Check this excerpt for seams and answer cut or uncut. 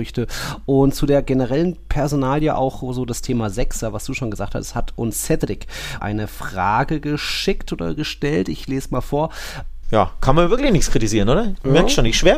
cut